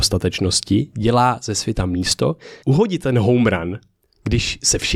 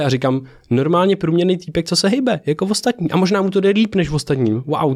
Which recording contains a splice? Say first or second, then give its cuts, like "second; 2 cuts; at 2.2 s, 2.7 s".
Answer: first; 1 cut; at 2.6 s